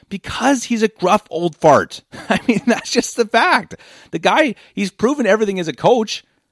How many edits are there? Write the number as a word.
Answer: zero